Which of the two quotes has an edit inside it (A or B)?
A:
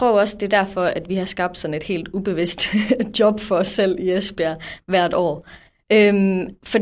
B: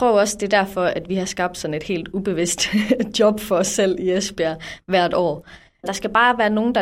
B